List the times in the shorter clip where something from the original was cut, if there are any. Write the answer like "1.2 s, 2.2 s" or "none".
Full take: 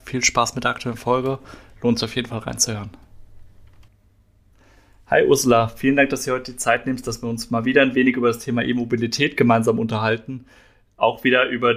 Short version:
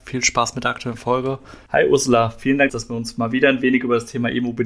1.7 s, 2.7 s